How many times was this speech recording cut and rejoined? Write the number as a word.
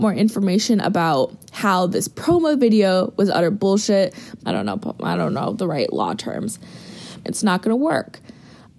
two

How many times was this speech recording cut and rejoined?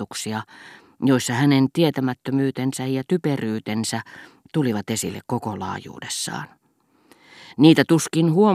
zero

